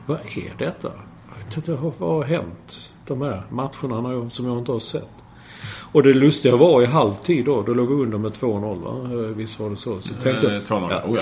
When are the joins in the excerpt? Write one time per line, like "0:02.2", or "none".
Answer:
0:03.0